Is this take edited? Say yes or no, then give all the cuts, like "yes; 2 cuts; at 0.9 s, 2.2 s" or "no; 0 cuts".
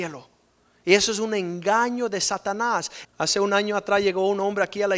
yes; 1 cut; at 3.0 s